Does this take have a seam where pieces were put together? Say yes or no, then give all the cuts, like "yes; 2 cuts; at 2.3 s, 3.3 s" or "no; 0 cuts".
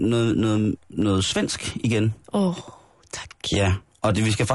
no; 0 cuts